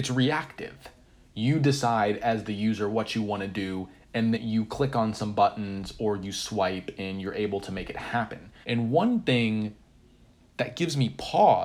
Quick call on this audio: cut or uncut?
cut